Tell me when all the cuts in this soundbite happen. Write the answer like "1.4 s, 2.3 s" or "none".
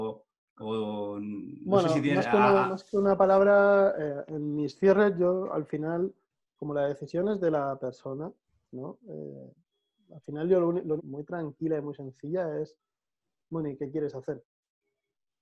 11.0 s